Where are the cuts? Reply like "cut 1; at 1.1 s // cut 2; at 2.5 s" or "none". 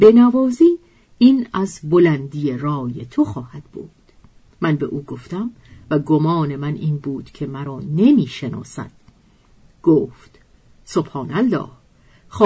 cut 1; at 9.7 s